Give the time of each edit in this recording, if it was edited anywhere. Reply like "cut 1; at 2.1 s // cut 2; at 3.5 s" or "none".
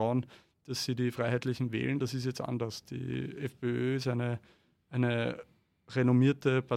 none